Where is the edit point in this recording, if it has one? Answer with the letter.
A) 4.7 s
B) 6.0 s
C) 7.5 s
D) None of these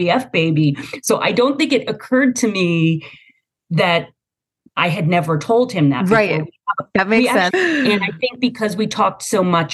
C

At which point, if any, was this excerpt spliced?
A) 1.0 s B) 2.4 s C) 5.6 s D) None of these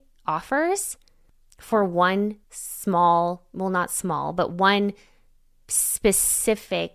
B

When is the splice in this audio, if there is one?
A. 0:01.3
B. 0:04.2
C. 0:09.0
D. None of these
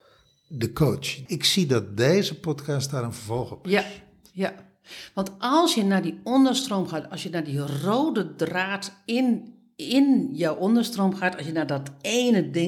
A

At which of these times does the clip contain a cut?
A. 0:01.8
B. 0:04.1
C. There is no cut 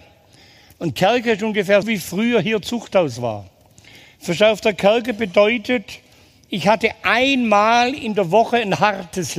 A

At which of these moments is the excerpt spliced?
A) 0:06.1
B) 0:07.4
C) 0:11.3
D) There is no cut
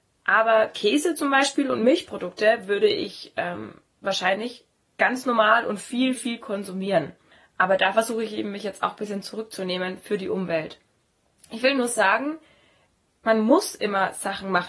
A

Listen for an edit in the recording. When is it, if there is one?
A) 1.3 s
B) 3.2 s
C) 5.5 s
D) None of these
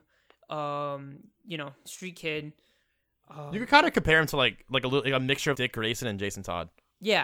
C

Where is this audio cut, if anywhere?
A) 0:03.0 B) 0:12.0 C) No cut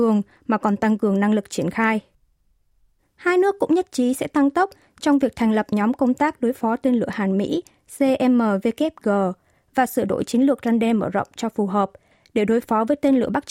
A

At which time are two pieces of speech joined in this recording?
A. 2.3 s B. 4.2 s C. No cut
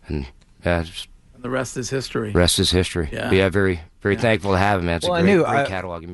C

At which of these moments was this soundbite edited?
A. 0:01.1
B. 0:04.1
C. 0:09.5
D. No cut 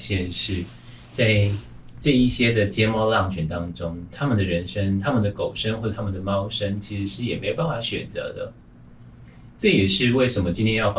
D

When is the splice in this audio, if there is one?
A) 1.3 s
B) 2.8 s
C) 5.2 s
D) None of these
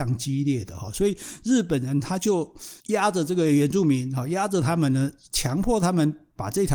B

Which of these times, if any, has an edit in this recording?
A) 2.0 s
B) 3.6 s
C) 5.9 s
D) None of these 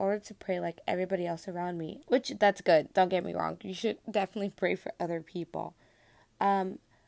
A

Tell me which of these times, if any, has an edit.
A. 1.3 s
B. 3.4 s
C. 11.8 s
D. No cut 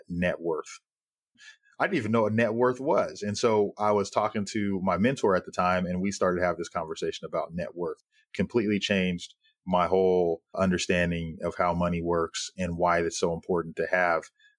A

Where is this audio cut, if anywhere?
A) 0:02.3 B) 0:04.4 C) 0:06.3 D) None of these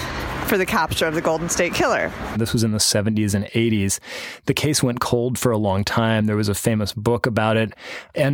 A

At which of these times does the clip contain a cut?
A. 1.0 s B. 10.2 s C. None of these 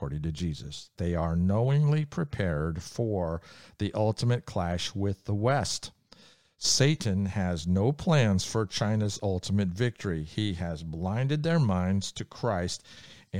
A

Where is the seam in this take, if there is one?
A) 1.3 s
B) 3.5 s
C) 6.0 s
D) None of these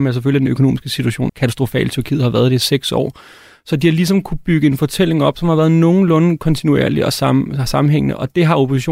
A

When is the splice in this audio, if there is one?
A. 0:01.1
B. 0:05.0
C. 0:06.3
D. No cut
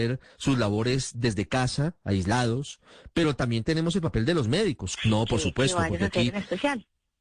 B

